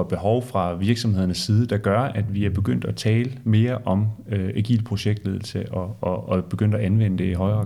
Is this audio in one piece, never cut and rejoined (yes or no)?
yes